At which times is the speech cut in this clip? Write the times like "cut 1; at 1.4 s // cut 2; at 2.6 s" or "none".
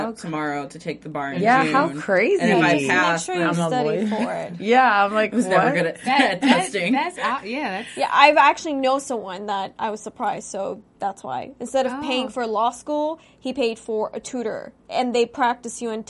cut 1; at 14.8 s